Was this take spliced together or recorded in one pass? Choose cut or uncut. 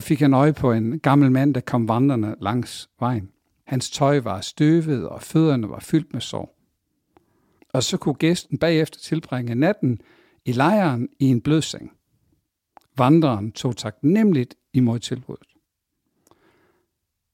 cut